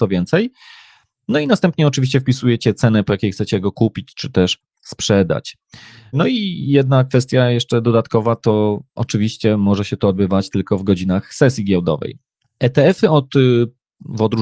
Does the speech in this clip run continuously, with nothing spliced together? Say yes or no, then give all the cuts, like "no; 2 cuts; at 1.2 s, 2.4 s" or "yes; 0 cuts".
yes; 0 cuts